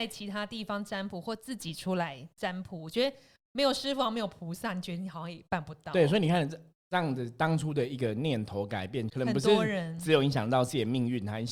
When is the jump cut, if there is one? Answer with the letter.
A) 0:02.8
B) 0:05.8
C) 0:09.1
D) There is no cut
C